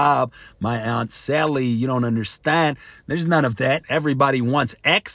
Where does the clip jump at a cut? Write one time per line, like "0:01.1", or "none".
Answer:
0:03.8